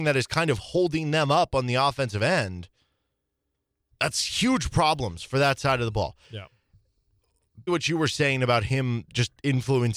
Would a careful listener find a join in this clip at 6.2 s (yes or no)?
yes